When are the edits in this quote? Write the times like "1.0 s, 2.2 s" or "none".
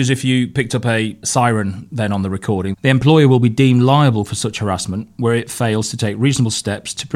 1.2 s, 2.7 s